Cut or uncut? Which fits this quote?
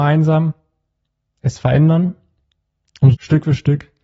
cut